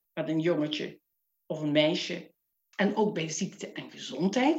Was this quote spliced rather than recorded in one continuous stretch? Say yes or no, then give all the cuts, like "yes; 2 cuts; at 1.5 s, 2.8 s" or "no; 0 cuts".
yes; 1 cut; at 2.7 s